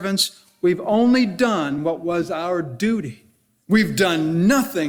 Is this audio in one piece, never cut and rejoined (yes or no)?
no